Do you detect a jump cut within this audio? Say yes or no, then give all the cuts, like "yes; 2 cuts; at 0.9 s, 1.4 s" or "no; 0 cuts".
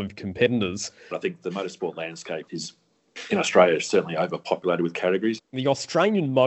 yes; 3 cuts; at 1.1 s, 2.5 s, 5.4 s